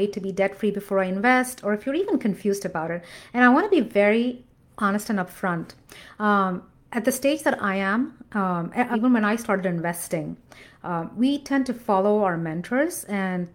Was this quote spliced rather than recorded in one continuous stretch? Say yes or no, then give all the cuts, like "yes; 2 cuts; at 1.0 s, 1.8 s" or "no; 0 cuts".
yes; 1 cut; at 8.9 s